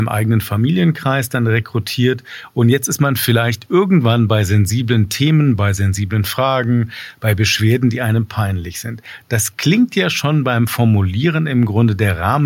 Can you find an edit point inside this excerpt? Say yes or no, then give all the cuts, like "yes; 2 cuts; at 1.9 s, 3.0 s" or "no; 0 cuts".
no; 0 cuts